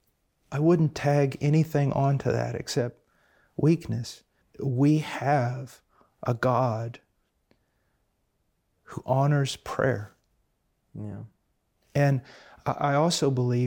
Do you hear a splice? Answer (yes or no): yes